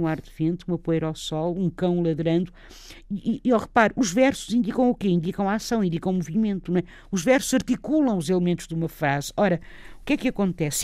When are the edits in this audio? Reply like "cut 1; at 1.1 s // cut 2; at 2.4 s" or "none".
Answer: none